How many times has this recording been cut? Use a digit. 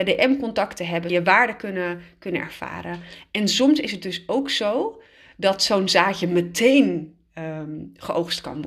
1